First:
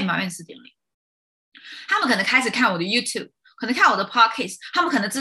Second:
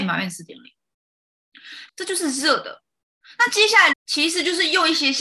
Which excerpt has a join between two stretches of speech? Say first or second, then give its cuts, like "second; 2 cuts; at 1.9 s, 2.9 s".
second; 2 cuts; at 1.9 s, 3.9 s